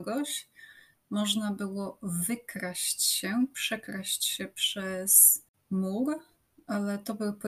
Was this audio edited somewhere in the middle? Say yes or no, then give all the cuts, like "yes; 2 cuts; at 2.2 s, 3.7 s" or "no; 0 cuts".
no; 0 cuts